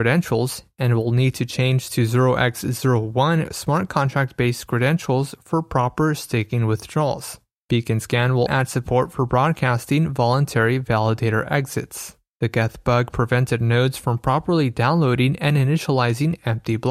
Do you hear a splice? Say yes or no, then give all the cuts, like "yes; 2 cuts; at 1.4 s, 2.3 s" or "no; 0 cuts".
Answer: yes; 2 cuts; at 8.5 s, 12.3 s